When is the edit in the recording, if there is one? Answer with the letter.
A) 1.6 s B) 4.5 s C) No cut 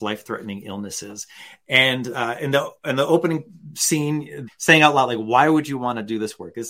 B